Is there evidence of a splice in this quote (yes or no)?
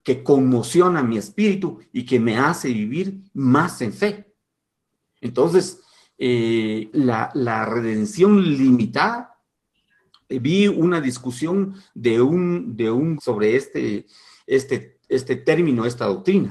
yes